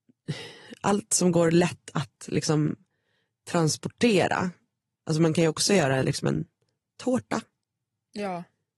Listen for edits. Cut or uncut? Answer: uncut